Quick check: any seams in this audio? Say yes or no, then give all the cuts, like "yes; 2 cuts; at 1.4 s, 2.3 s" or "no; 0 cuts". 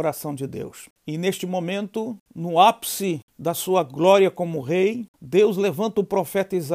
no; 0 cuts